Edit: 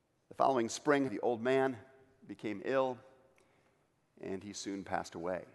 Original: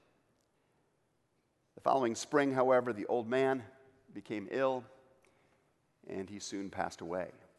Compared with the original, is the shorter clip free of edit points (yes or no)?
no